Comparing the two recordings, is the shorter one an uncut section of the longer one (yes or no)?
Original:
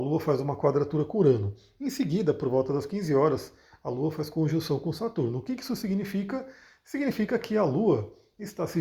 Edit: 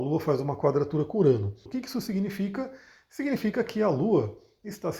no